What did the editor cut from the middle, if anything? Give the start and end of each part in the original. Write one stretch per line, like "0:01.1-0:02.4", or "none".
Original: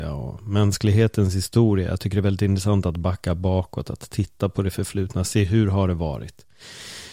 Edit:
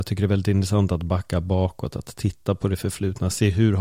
none

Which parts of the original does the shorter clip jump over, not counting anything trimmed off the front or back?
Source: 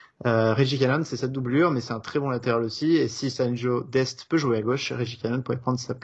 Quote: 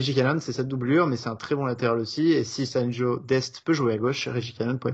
none

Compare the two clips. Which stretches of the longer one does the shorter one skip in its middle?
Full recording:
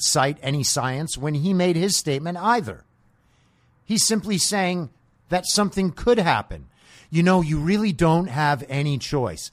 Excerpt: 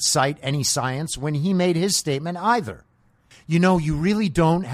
0:03.3-0:06.9

